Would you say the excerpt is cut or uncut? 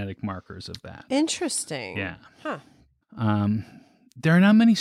cut